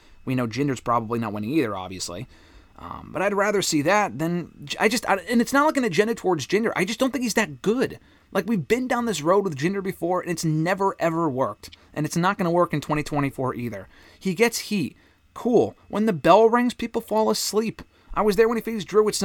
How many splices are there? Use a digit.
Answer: 0